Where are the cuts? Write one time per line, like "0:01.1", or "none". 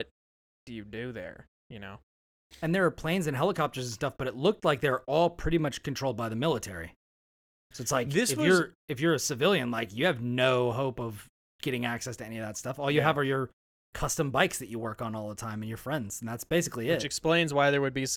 none